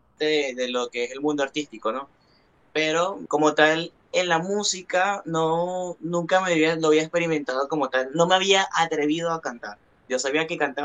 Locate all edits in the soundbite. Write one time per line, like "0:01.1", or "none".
0:03.3